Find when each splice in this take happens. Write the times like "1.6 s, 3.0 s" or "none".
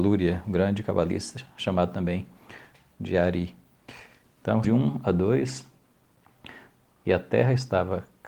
4.6 s, 7.0 s

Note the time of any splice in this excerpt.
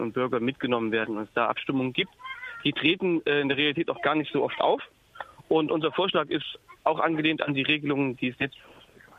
none

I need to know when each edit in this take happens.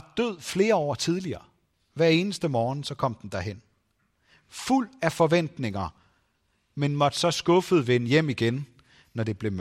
1.7 s

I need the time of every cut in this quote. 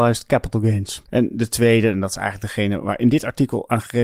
1.1 s

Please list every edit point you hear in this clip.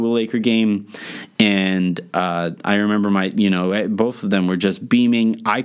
none

